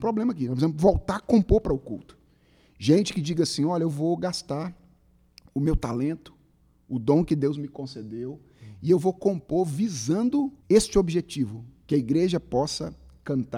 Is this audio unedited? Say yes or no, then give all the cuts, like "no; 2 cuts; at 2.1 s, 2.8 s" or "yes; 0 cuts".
no; 1 cut; at 10.6 s